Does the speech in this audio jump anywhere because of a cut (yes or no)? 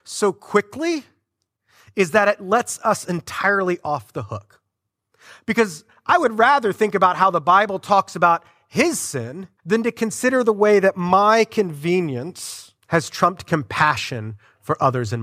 yes